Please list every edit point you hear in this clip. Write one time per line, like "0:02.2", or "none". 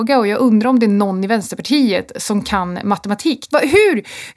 0:03.5